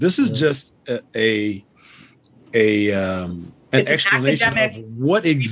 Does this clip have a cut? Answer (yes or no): no